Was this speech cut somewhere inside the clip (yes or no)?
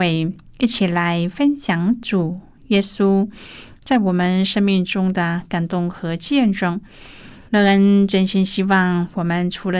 yes